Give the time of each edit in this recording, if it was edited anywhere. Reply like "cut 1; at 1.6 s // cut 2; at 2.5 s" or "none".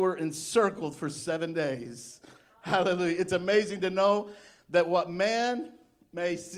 none